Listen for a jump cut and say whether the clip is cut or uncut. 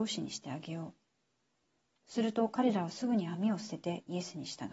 uncut